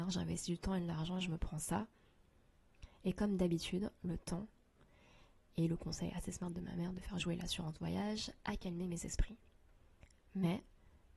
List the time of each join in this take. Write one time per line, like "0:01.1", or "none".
none